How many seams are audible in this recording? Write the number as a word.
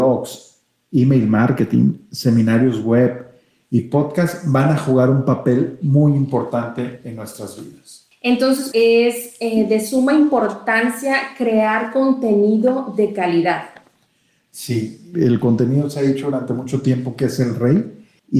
two